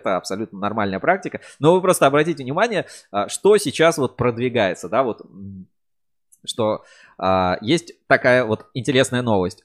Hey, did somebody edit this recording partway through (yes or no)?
no